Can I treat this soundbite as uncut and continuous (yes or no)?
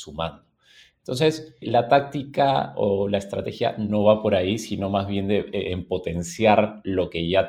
no